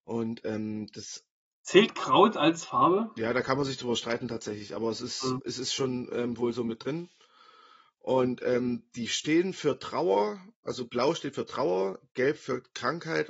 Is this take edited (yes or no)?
no